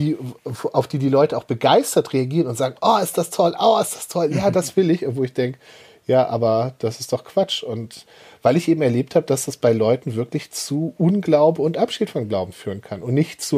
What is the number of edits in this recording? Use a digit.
0